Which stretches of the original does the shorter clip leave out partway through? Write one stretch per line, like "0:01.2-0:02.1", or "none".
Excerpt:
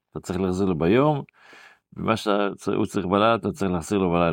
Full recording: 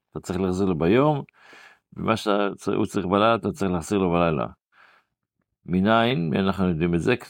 none